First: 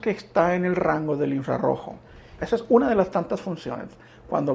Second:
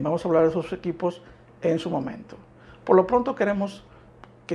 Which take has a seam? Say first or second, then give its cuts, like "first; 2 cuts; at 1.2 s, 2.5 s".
first; 1 cut; at 2.4 s